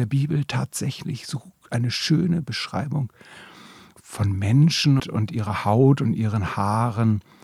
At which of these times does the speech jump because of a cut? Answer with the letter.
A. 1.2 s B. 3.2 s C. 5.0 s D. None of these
C